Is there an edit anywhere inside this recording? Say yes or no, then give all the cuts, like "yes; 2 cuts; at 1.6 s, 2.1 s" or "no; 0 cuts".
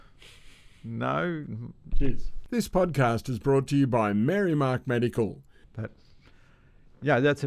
yes; 2 cuts; at 1.9 s, 5.6 s